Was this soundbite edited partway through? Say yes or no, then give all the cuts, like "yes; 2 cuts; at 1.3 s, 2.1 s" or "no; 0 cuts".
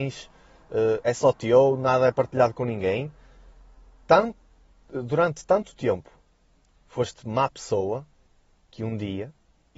no; 0 cuts